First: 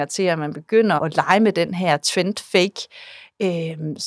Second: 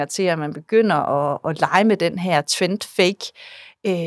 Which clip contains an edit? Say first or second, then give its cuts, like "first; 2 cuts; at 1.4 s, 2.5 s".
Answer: first; 1 cut; at 1.0 s